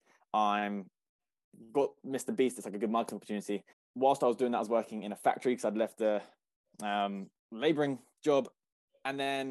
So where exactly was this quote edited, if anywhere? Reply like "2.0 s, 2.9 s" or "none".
3.7 s, 7.4 s